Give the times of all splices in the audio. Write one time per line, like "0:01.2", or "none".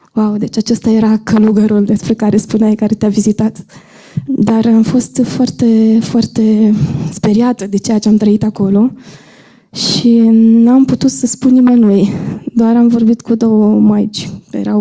0:04.3